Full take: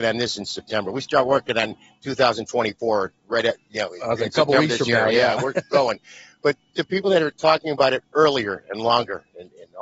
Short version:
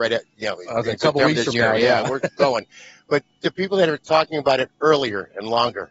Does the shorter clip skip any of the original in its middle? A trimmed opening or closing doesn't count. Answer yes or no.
no